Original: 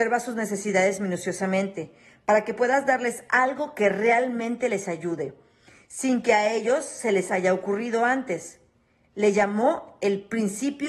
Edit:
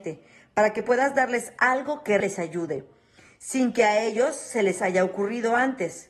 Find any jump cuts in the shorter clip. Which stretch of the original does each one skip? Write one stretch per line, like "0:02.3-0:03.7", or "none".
0:03.9-0:04.7